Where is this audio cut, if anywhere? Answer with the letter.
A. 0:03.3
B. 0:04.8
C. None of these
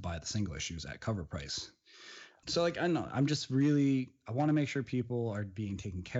C